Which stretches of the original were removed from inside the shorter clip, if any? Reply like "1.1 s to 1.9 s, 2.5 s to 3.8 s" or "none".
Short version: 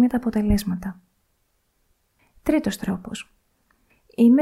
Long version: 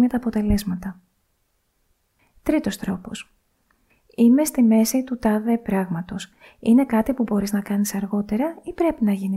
none

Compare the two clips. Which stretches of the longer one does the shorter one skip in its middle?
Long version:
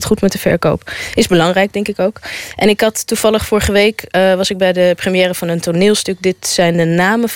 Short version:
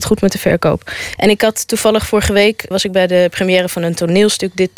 1.2 s to 2.5 s, 4.1 s to 4.4 s

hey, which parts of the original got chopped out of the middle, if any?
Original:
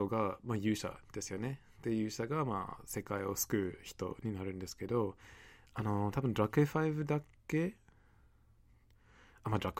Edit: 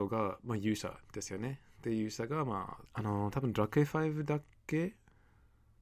2.9 s to 5.7 s

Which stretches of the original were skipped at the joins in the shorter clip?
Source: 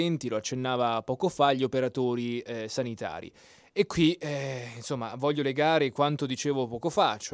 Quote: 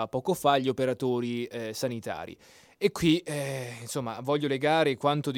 none

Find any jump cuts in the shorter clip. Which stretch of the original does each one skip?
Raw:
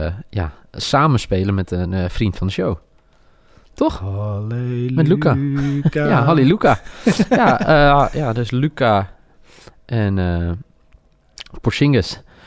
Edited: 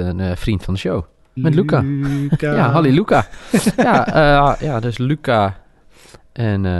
3.1 s to 4.9 s

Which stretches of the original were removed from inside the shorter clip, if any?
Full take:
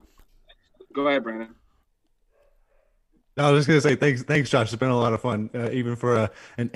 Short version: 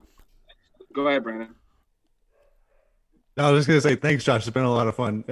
4.0 s to 4.2 s

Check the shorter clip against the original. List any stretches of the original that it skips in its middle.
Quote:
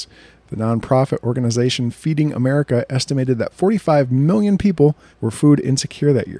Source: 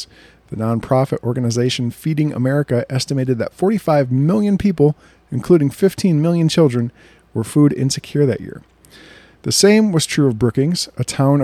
5.1 s to 7.2 s

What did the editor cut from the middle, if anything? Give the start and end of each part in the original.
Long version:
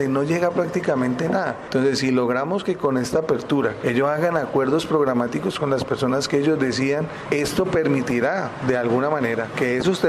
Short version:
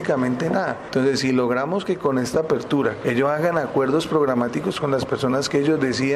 none

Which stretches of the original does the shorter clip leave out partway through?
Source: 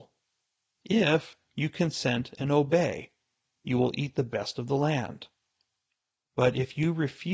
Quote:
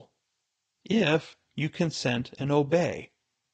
none

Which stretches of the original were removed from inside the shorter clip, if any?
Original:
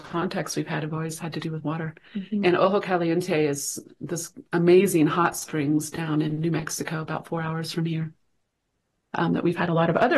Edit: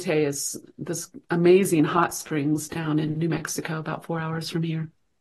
none

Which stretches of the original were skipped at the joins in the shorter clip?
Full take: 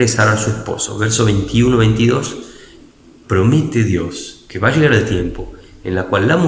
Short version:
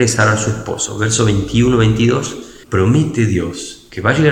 2.6 s to 3.2 s

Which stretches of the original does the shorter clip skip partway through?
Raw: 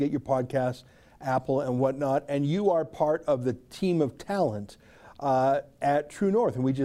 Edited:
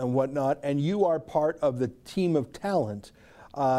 none

